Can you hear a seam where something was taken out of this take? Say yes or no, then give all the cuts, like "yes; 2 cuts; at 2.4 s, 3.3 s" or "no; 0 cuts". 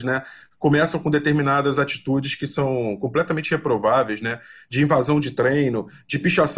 no; 0 cuts